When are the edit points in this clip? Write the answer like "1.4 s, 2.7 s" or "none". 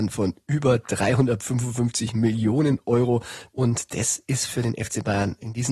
3.5 s